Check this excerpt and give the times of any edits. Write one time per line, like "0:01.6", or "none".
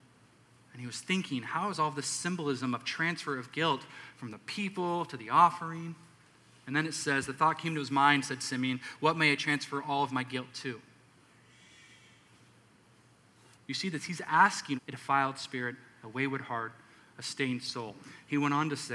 0:13.5
0:14.8